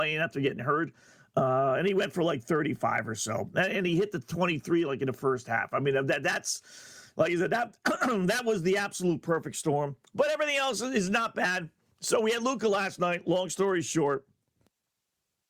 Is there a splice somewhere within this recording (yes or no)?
no